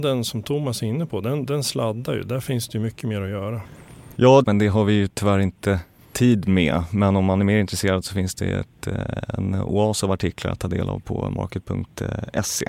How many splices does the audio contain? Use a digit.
1